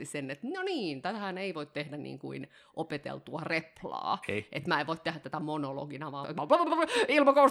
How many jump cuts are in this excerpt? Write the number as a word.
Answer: one